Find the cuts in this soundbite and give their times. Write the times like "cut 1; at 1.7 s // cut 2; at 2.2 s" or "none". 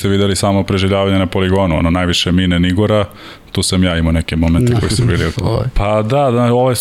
cut 1; at 5.3 s